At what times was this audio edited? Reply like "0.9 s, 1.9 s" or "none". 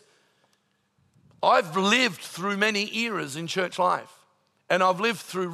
4.6 s